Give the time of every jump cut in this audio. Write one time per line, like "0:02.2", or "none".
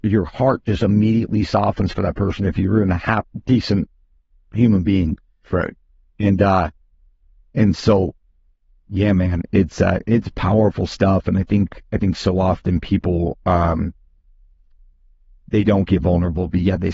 none